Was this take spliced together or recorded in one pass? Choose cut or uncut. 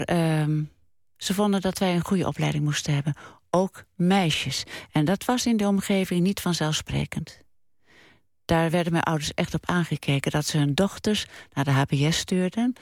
uncut